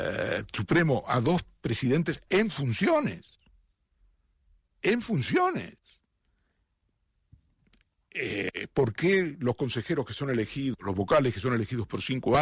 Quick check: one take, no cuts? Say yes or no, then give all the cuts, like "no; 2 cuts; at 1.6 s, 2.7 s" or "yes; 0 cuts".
yes; 0 cuts